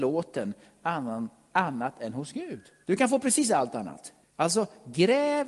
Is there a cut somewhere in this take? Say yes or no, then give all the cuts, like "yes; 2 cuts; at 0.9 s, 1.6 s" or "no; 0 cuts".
yes; 2 cuts; at 2.8 s, 4.2 s